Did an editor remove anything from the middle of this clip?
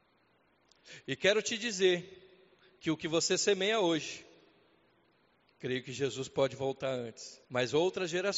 yes; 1 cut; at 7.5 s

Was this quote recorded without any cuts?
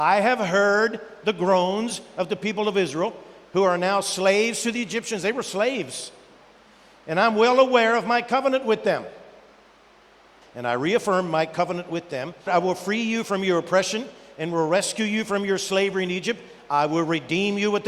no; 2 cuts; at 10.4 s, 12.5 s

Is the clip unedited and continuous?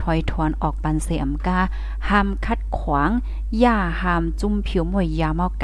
yes; 0 cuts

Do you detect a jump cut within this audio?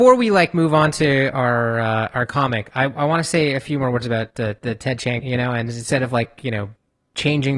yes; 1 cut; at 5.2 s

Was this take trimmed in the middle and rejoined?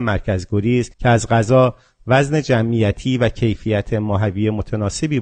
yes; 1 cut; at 0.9 s

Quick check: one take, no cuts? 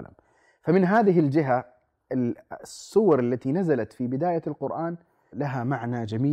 no; 1 cut; at 5.3 s

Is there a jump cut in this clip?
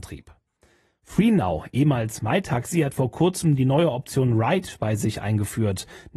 no; 0 cuts

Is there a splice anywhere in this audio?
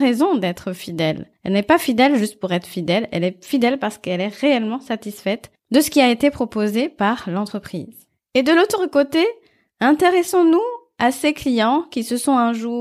no; 0 cuts

